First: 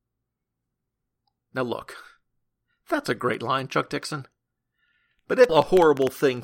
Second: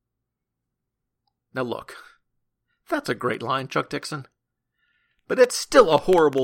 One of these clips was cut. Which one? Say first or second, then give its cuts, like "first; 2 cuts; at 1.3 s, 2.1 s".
first; 1 cut; at 5.5 s